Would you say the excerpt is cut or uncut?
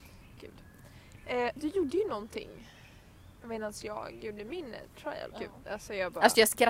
cut